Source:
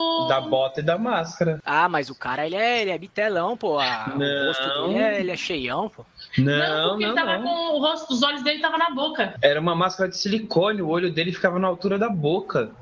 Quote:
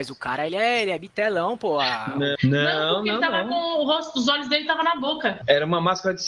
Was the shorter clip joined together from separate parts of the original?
yes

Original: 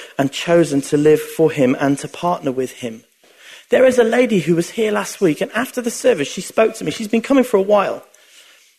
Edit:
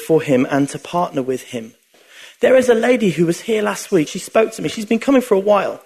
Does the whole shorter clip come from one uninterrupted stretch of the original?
no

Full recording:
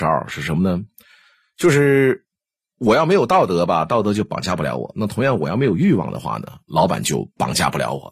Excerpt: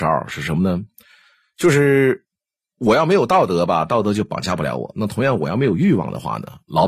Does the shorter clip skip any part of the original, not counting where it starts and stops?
no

